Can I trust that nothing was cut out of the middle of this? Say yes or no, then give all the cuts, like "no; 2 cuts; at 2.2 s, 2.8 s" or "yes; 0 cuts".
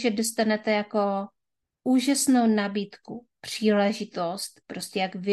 yes; 0 cuts